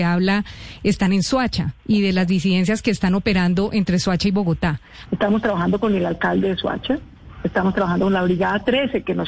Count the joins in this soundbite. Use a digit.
2